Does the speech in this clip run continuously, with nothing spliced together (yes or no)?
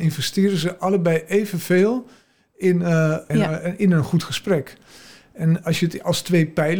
no